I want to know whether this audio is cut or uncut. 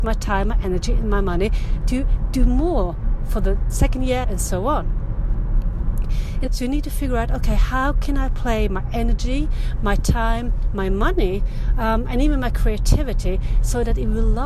cut